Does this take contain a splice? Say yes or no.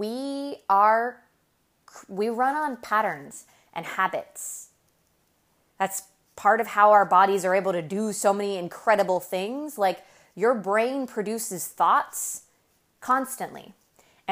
no